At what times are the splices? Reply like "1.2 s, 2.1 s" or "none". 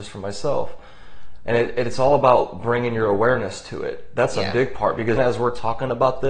1.5 s, 5.2 s

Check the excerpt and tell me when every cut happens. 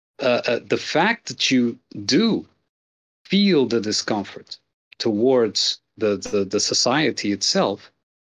6.0 s

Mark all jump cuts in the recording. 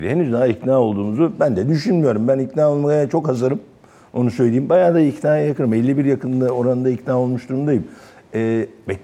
none

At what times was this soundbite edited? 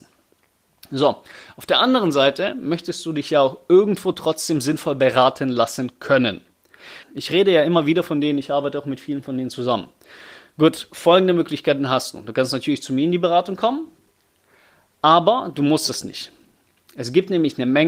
7.0 s

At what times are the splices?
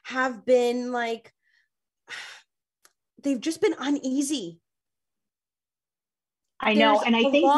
none

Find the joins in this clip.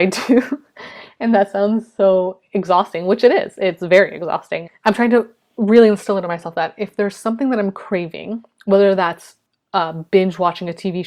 4.7 s

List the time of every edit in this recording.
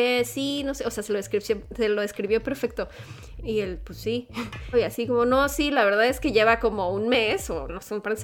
3.4 s, 4.7 s

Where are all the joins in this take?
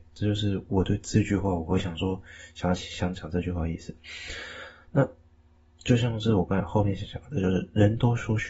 none

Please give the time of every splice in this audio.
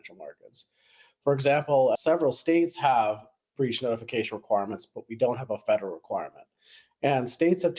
1.9 s

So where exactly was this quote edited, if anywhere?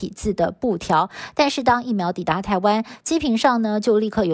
none

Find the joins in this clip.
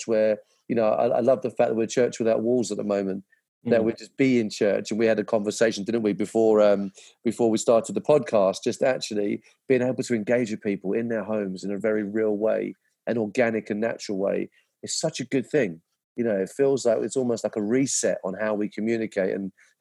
none

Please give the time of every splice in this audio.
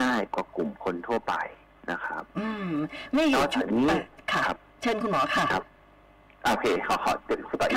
none

